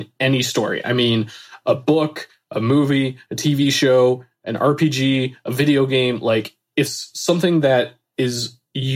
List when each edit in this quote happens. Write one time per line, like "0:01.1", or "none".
none